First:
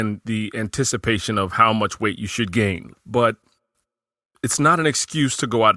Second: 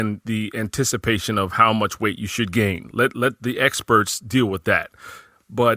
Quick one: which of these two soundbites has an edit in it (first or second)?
first